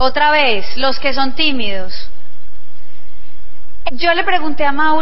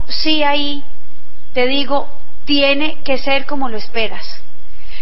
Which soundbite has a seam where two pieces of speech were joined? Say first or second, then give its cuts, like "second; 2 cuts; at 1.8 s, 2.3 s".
first; 1 cut; at 3.9 s